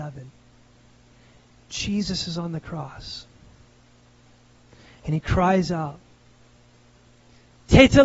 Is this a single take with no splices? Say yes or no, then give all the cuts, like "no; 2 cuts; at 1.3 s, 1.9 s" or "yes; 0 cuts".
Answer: yes; 0 cuts